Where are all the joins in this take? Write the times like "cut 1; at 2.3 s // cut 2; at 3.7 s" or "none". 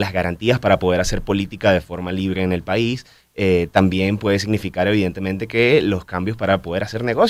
none